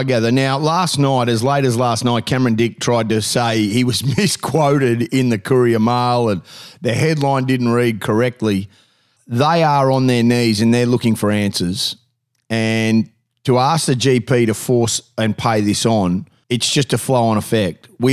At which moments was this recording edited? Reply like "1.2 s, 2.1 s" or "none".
16.4 s